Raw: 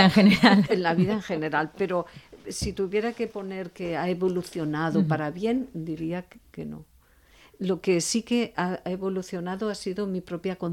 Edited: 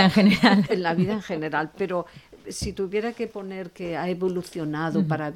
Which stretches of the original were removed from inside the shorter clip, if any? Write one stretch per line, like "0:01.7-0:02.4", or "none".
none